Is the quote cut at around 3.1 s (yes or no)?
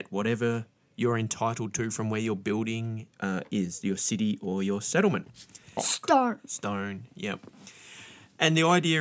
yes